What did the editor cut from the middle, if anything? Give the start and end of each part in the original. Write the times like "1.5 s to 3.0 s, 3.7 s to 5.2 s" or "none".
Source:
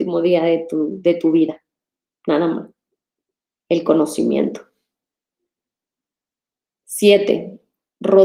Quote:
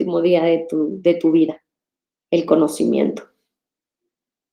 2.2 s to 3.5 s